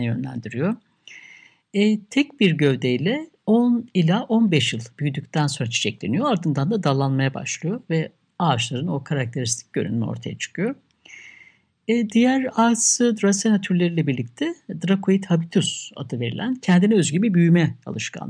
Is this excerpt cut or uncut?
uncut